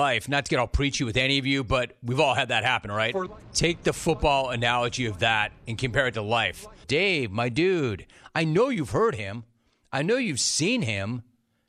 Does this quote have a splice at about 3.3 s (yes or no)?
yes